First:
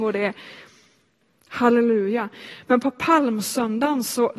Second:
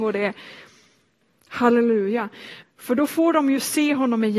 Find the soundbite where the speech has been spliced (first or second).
second